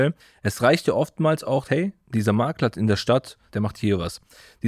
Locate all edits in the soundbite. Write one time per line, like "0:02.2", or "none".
0:01.7
0:03.5